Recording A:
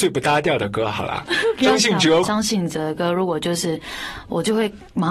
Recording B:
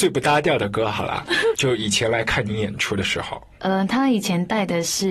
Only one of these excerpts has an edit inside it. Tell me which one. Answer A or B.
B